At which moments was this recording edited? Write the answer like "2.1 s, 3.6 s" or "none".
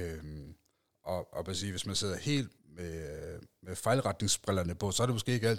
2.6 s